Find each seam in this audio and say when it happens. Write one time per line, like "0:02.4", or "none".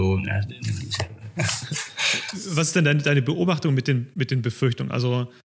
0:01.3